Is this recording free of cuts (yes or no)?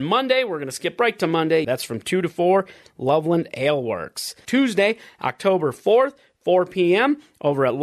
no